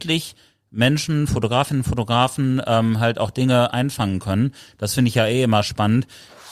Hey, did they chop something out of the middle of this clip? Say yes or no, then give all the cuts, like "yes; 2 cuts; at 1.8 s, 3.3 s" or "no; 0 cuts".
no; 0 cuts